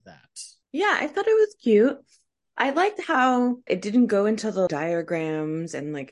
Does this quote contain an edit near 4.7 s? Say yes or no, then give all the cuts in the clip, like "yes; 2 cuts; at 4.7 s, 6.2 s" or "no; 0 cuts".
yes; 2 cuts; at 3.7 s, 4.7 s